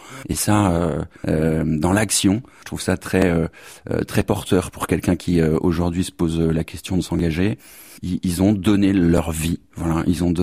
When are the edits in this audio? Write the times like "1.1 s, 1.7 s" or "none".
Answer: 1.2 s